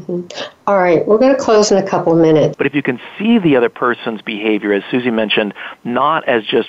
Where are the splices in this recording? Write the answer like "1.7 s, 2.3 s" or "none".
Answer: 2.5 s